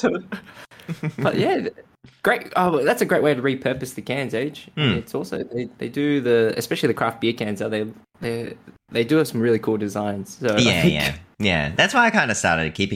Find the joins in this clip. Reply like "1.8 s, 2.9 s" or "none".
none

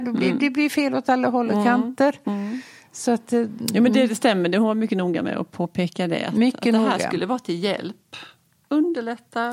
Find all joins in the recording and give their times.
none

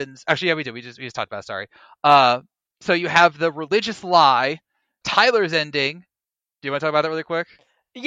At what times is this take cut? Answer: 5.0 s

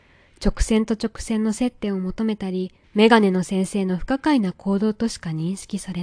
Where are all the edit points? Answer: 2.8 s

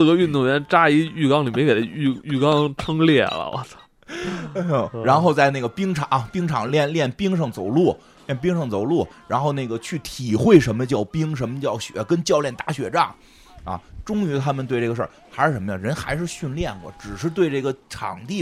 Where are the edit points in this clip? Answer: none

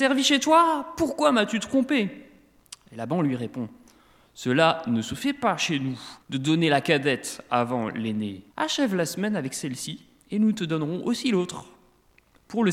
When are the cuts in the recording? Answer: 6.2 s, 8.5 s

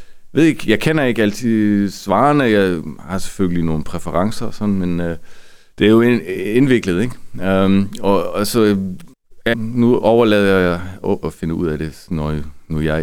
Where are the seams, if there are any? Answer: 9.5 s, 11.2 s

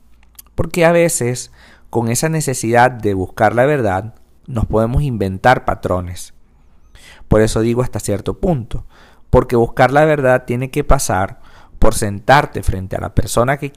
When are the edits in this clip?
none

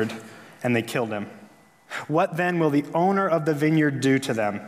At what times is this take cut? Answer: none

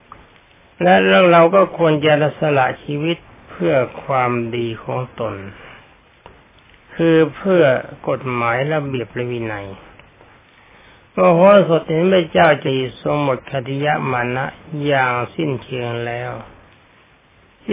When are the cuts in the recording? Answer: 12.7 s

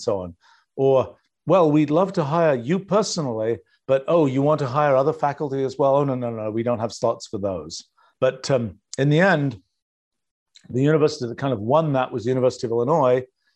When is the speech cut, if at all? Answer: 8.1 s

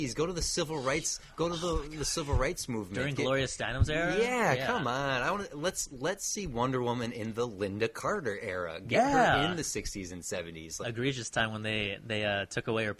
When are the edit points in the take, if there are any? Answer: 10.8 s

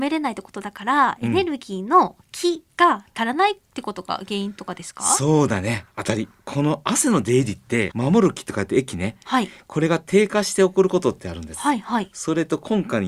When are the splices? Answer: 7.9 s

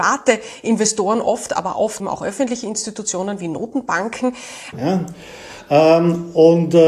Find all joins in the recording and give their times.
2.0 s, 4.7 s

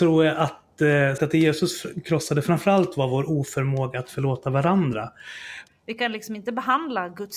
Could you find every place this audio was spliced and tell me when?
1.2 s, 5.7 s

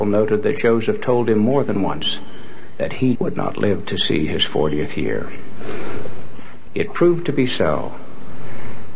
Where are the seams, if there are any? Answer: 3.2 s, 6.7 s

